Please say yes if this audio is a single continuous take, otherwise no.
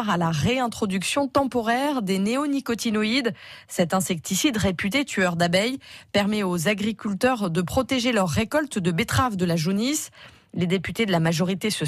yes